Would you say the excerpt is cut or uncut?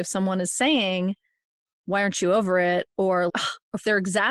cut